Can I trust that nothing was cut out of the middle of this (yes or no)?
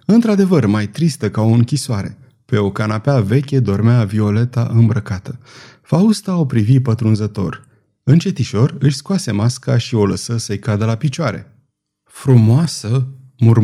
yes